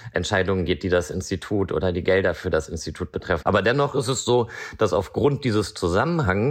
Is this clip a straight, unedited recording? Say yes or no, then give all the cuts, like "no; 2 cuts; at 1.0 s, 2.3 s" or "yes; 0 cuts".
no; 1 cut; at 3.4 s